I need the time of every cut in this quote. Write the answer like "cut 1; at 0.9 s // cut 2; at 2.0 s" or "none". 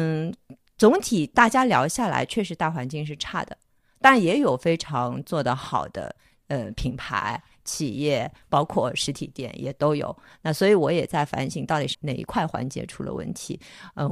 cut 1; at 11.9 s